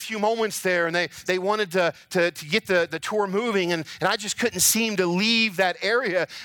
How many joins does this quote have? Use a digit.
0